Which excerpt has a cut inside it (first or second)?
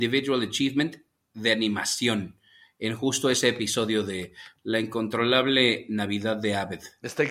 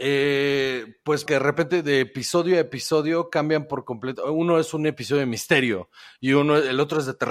second